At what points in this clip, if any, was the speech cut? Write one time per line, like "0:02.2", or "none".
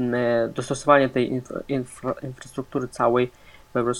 none

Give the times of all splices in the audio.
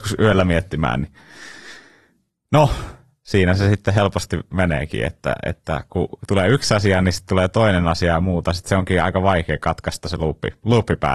none

